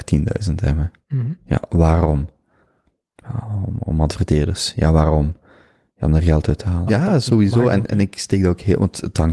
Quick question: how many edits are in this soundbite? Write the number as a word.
one